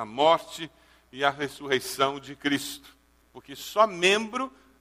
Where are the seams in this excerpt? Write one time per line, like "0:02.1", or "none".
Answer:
0:03.2